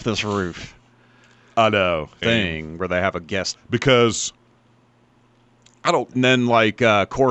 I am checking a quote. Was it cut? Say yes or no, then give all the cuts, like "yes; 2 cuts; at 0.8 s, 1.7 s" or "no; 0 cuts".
yes; 3 cuts; at 2.2 s, 3.5 s, 6.1 s